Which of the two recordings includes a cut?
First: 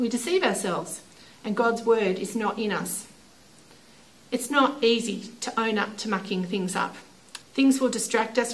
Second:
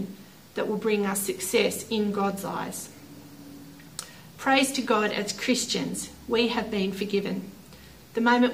first; 1 cut; at 7.4 s

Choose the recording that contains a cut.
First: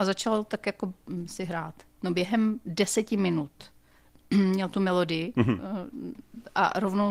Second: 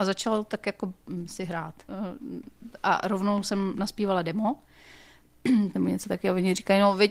second; 2 cuts; at 1.9 s, 5.7 s

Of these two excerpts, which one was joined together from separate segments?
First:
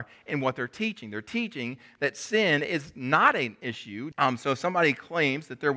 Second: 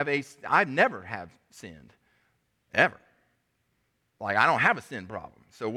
first; 1 cut; at 4.1 s

